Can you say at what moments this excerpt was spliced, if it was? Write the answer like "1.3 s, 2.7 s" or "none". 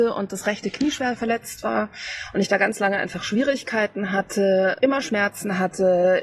4.8 s